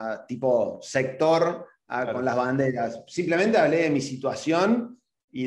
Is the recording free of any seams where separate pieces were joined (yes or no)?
yes